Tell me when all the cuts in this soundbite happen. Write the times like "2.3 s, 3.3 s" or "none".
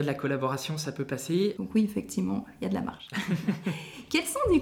1.6 s

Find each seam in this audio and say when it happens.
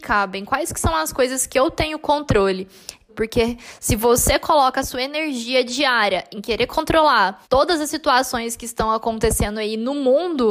3.1 s, 7.4 s

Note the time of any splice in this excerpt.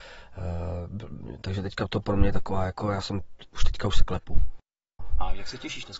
none

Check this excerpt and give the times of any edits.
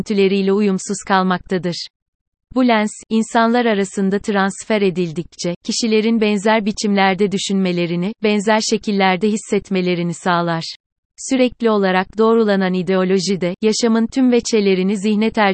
2.4 s, 11.1 s

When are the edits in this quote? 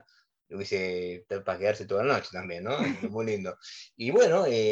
3.0 s

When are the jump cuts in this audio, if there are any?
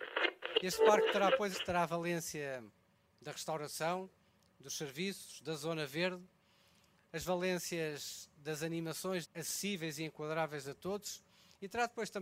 1.5 s, 9.2 s

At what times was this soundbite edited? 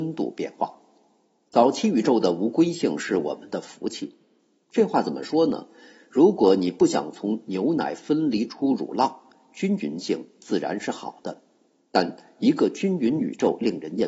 none

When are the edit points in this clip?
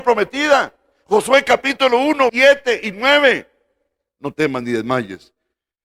2.3 s

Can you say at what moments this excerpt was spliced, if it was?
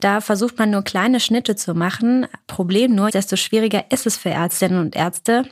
3.1 s

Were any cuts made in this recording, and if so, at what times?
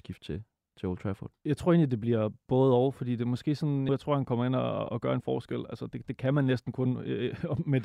3.9 s

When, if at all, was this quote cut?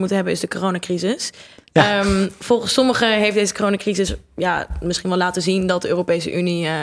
none

